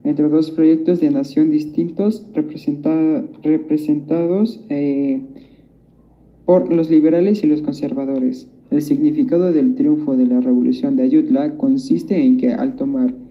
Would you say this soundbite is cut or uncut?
cut